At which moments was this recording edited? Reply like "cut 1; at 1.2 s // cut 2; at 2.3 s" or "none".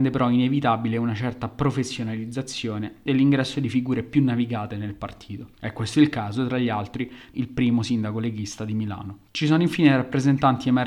cut 1; at 5.5 s // cut 2; at 7.3 s